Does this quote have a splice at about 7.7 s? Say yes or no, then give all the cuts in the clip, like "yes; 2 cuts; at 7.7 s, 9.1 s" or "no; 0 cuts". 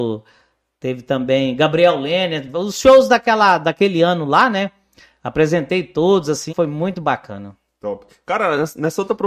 no; 1 cut; at 6.5 s